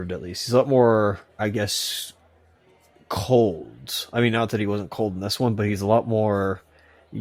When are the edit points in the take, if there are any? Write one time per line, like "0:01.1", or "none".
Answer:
none